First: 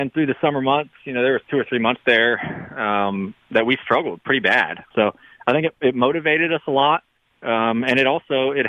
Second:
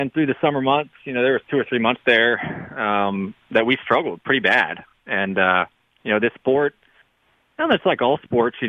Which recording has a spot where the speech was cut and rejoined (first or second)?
first